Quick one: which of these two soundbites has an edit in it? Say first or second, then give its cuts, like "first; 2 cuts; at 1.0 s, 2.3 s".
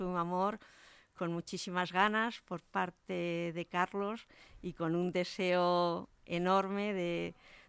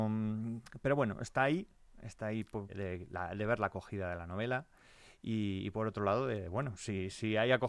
second; 1 cut; at 2.7 s